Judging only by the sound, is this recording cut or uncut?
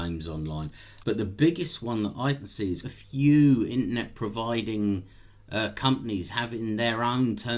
cut